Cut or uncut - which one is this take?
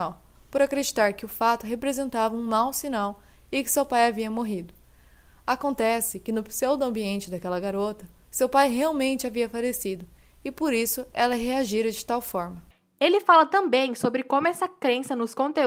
uncut